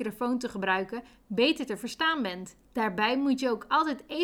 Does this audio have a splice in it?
yes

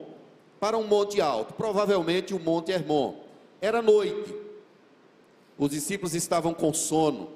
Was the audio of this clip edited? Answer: no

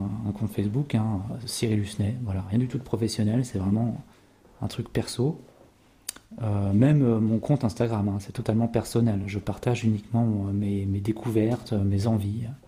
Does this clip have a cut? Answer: no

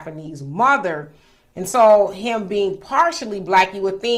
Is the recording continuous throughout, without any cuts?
yes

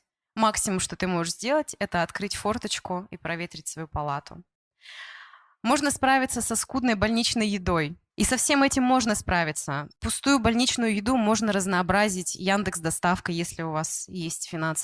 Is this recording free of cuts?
no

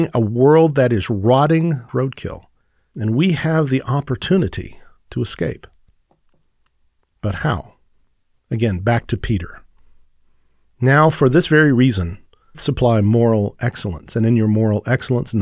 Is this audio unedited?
no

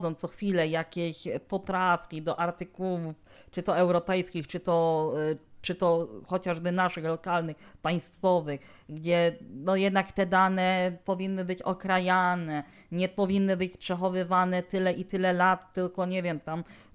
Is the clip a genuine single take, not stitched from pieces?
yes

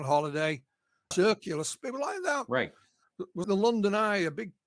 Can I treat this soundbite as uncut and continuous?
no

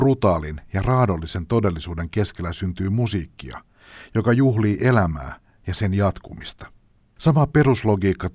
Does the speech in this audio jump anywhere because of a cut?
no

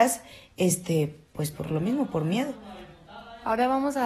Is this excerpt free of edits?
yes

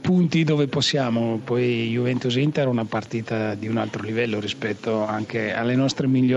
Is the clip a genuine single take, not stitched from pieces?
yes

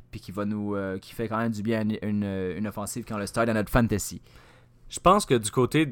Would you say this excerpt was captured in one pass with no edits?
yes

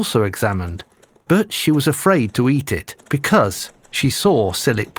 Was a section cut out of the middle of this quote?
yes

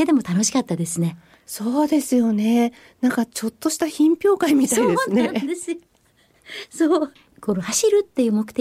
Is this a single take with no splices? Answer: yes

